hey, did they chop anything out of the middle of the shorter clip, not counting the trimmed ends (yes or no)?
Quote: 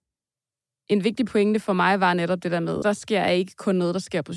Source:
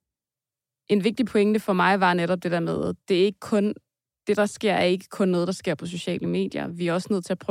yes